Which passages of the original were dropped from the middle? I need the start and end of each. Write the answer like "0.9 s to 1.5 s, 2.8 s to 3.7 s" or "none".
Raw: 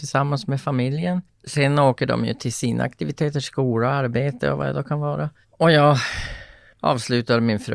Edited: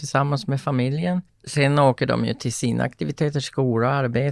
none

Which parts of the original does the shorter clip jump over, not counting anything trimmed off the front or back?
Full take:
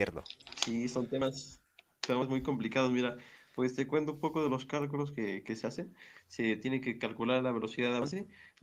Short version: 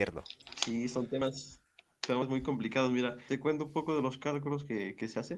3.3 s to 3.8 s

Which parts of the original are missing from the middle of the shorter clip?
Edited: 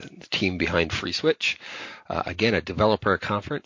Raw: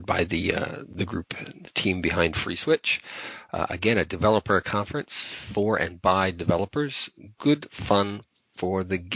none

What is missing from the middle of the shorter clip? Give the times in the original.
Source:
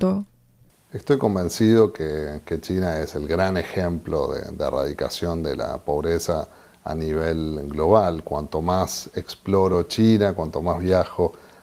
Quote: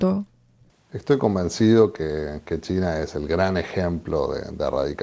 none

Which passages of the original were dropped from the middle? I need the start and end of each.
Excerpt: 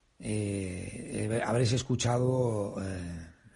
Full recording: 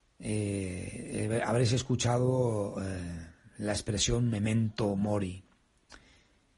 none

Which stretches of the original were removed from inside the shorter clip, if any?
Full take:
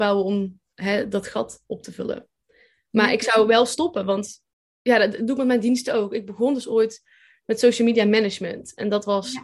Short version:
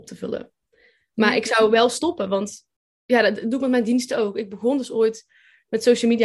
none

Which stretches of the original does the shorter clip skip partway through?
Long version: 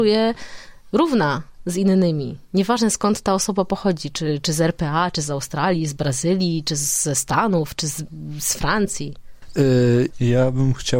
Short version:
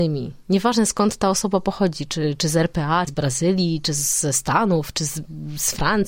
5.1 s to 5.9 s

